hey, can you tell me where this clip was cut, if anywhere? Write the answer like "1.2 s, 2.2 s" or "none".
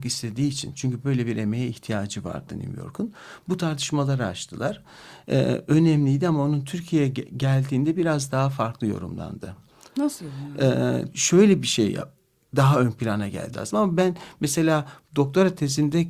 11.1 s, 13.5 s

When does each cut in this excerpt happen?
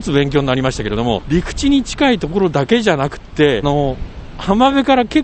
1.2 s, 3.6 s

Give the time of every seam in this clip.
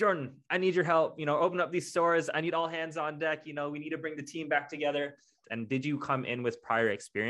5.4 s

